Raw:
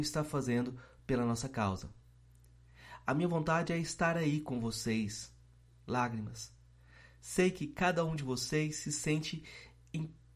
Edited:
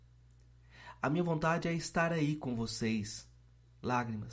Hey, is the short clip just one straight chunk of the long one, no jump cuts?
yes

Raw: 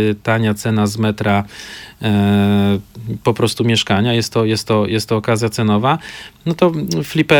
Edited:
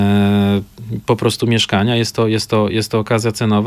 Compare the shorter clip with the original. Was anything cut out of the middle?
no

